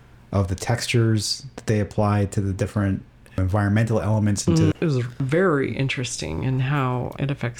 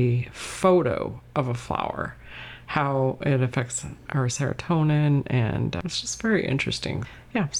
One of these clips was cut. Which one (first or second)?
first